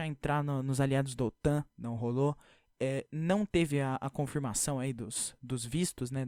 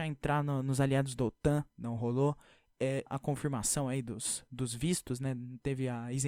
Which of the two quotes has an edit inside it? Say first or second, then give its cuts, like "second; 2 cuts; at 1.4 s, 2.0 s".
second; 1 cut; at 3.1 s